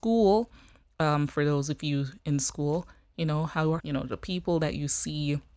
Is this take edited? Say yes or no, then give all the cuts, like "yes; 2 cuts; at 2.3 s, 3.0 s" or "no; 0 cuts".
yes; 1 cut; at 3.8 s